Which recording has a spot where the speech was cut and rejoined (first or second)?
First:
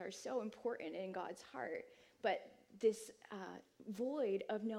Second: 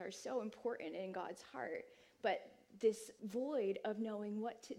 second